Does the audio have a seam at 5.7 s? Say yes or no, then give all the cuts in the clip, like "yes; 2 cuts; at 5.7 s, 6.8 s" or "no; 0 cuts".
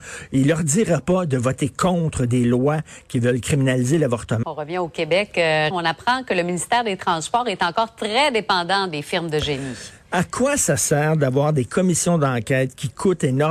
yes; 2 cuts; at 4.4 s, 5.7 s